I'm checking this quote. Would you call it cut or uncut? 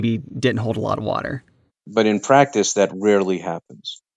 cut